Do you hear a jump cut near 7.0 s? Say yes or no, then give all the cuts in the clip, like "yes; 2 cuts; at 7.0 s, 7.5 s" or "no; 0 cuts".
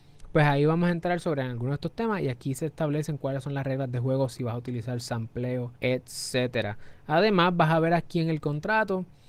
no; 1 cut; at 5.8 s